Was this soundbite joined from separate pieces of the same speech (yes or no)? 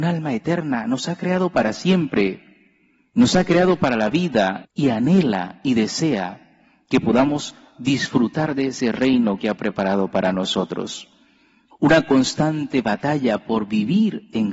yes